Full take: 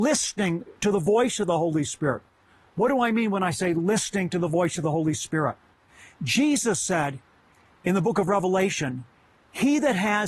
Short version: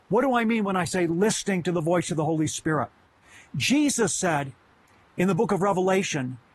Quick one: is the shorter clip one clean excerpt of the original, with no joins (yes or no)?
yes